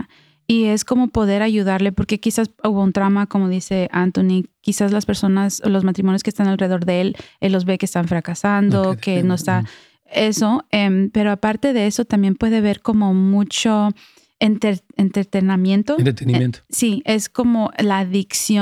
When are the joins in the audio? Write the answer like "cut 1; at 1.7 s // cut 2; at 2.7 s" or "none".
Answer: none